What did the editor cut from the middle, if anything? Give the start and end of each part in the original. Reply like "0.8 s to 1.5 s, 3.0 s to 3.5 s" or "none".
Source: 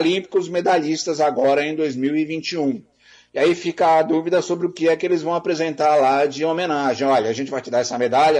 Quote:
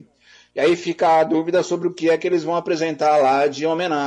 none